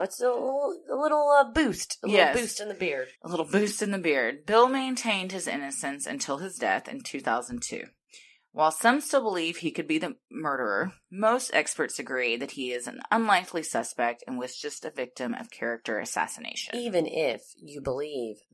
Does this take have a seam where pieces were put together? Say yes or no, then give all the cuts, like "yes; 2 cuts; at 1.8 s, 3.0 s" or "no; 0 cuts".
yes; 1 cut; at 3.1 s